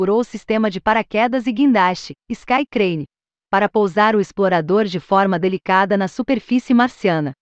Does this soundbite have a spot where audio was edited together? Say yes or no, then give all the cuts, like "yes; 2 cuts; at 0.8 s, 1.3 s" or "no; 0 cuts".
no; 0 cuts